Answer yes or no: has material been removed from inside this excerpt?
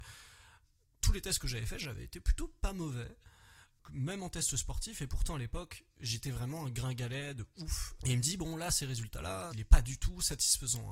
yes